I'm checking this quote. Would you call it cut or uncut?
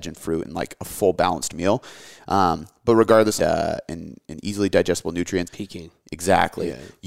cut